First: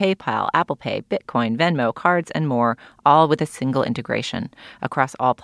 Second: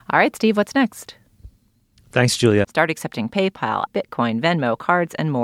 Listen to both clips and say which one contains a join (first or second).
second